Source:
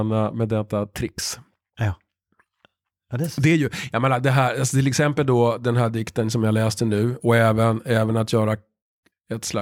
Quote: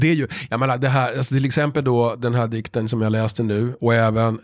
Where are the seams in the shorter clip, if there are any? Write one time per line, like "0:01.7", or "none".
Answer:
none